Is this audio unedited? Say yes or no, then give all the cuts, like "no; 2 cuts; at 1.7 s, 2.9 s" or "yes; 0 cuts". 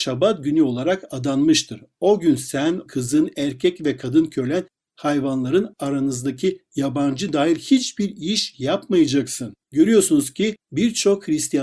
no; 2 cuts; at 2.9 s, 9.6 s